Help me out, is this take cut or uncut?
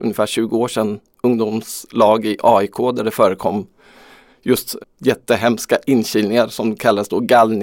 cut